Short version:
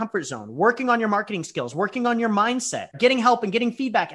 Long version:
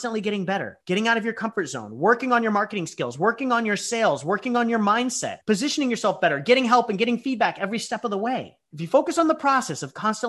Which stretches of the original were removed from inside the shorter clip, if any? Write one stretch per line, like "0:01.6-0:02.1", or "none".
0:03.1-0:04.2
0:05.4-0:06.4